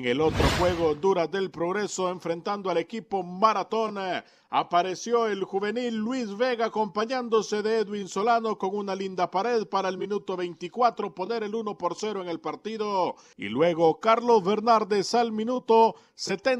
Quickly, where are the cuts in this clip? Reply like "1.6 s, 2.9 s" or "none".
13.3 s